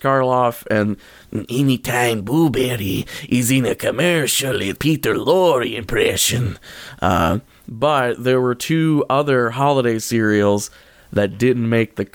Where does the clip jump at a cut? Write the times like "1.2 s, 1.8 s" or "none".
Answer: none